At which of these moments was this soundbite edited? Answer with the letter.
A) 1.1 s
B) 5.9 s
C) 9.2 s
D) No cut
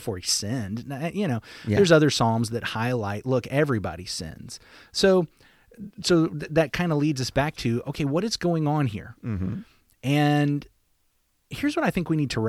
D